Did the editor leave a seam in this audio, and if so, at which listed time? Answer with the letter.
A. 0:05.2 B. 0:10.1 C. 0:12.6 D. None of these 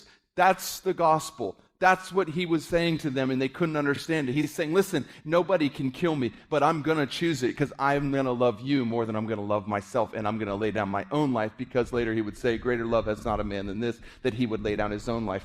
A